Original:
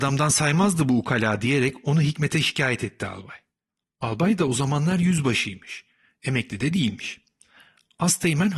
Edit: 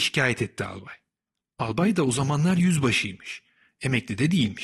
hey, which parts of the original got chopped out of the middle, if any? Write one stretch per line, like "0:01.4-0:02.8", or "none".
none